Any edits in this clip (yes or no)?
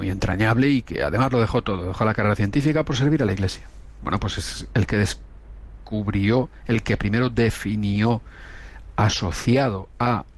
yes